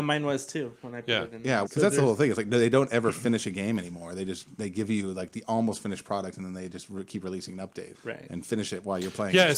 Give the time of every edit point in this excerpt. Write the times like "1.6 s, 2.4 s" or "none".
1.7 s, 7.9 s